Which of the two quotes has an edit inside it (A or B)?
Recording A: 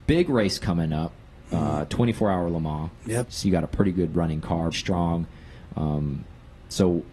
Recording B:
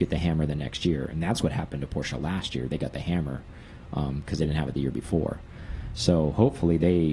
A